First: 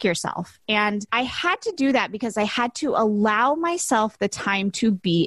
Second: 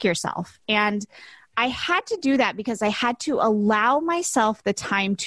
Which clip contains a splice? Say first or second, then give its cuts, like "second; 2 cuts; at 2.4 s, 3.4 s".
first; 1 cut; at 1.1 s